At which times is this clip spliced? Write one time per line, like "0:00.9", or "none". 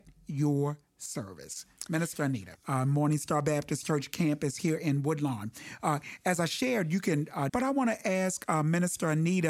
0:02.5
0:07.5